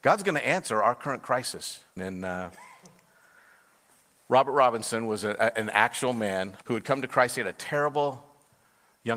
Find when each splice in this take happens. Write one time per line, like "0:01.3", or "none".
0:02.0
0:06.6